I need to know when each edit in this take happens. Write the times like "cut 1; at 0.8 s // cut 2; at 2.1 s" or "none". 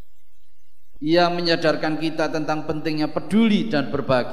cut 1; at 1.0 s

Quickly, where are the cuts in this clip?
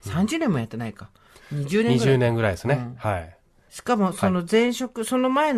cut 1; at 3.7 s

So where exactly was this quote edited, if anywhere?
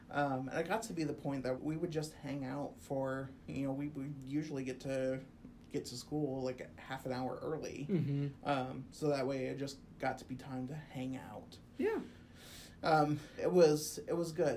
cut 1; at 1.6 s // cut 2; at 13.4 s

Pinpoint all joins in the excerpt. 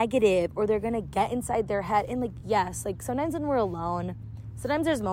none

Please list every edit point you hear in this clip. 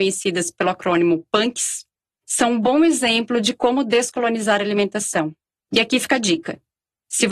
cut 1; at 5.6 s

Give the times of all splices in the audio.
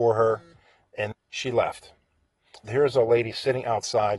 cut 1; at 1.1 s // cut 2; at 2.6 s

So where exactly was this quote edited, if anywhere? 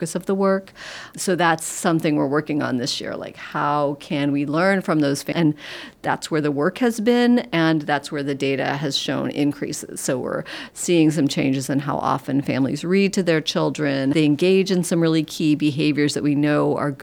cut 1; at 5.3 s // cut 2; at 14.1 s

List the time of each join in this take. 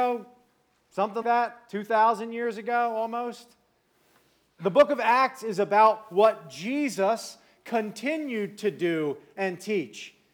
cut 1; at 1.2 s // cut 2; at 4.5 s

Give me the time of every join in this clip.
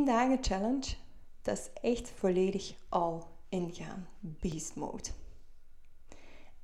none

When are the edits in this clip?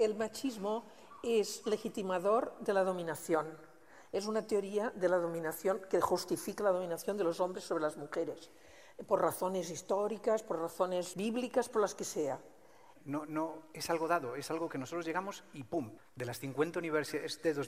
cut 1; at 11.1 s // cut 2; at 13.0 s // cut 3; at 16.0 s

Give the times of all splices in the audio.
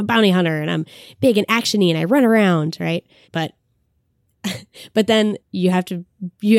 cut 1; at 3.2 s // cut 2; at 5.4 s

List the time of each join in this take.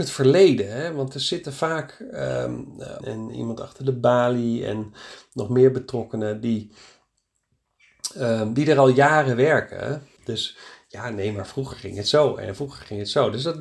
cut 1; at 3.0 s // cut 2; at 10.2 s

